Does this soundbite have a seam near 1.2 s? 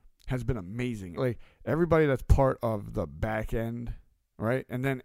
yes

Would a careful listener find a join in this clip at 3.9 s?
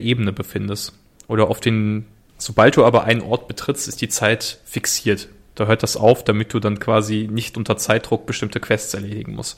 no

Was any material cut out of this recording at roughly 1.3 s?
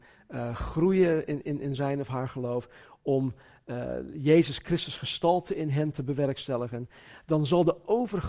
no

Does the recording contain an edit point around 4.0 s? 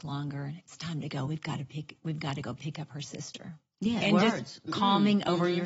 yes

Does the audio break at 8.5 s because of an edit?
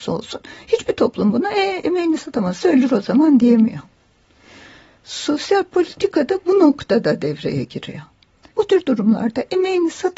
yes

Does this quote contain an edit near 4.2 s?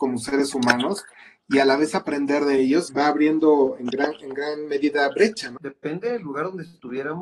no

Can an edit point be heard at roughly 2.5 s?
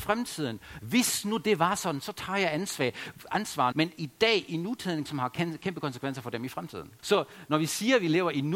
no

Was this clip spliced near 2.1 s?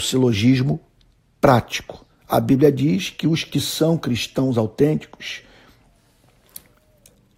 no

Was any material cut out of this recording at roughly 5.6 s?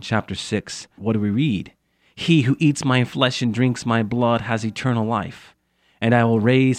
no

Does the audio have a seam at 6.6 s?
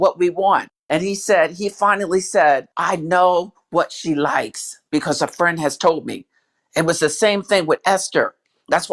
no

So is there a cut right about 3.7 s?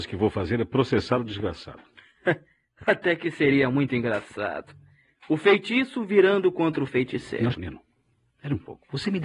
no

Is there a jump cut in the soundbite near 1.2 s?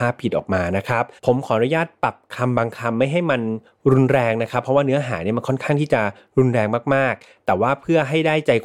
yes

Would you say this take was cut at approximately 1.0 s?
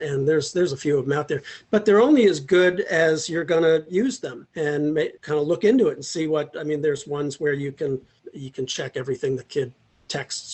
no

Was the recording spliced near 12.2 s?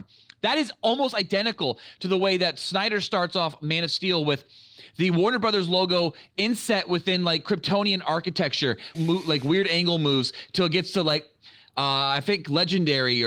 no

